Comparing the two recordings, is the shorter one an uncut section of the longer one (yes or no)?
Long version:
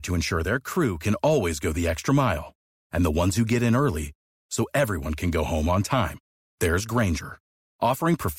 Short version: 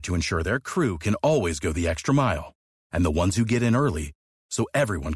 yes